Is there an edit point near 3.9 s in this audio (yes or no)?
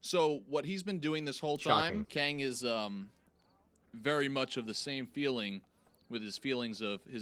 no